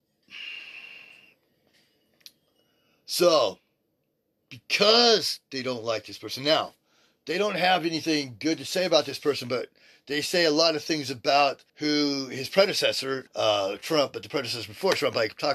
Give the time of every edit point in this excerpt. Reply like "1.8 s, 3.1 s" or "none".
11.7 s, 13.3 s